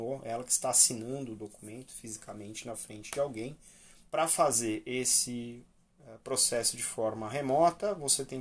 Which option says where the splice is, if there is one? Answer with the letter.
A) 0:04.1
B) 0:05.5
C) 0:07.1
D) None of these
A